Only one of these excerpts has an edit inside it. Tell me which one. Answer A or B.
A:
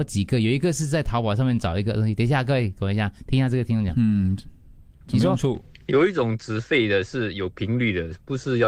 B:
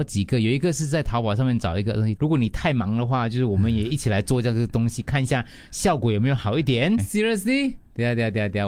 B